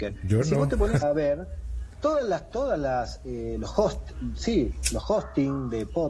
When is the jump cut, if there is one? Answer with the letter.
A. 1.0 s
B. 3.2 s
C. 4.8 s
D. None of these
A